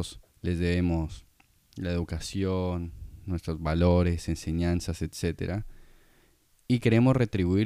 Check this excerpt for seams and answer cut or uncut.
uncut